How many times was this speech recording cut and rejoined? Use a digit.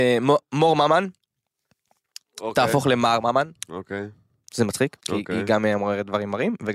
1